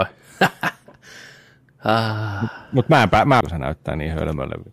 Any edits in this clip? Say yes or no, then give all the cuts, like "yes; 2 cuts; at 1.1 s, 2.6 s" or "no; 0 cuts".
yes; 1 cut; at 3.4 s